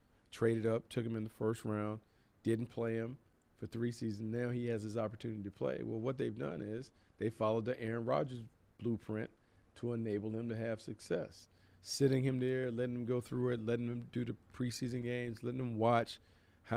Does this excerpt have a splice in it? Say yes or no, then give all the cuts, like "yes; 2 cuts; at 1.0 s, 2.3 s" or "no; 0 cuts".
no; 0 cuts